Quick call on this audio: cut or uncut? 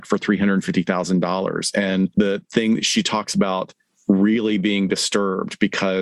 uncut